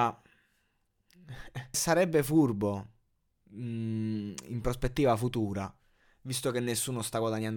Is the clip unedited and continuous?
no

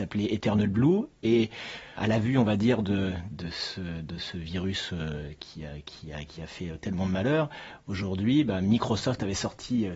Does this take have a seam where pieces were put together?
yes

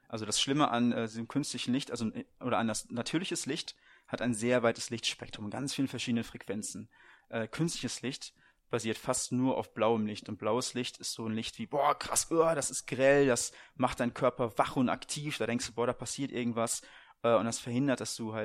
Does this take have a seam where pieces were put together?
no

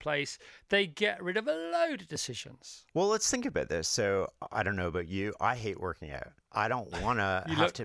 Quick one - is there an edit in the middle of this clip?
yes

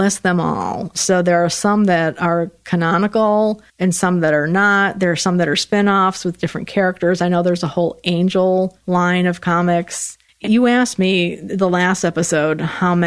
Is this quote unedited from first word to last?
no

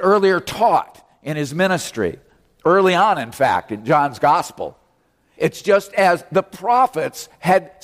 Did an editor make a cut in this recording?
yes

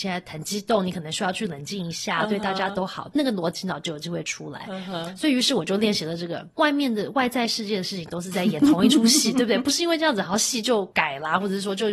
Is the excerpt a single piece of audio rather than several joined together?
no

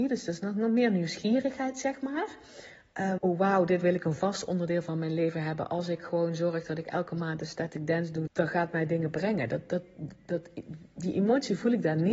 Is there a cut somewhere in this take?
yes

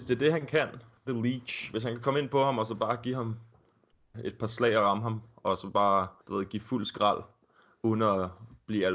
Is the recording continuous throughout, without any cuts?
no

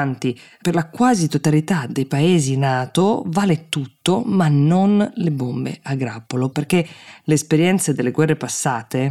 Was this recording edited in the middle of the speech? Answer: yes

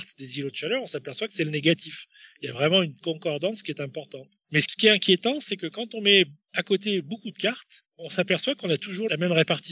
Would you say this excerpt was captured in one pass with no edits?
no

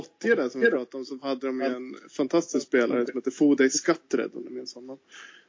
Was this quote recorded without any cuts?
yes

